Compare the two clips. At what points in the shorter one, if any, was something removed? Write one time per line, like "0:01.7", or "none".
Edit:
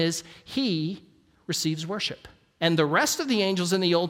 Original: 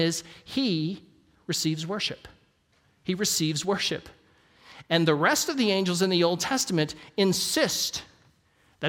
0:02.6